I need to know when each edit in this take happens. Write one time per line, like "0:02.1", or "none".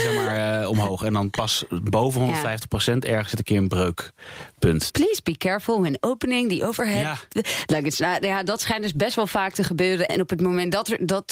0:04.9
0:10.1